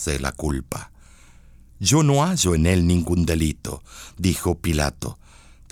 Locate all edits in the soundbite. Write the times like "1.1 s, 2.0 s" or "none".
none